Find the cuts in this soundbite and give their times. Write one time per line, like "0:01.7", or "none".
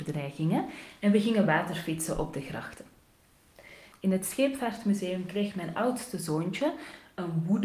0:03.9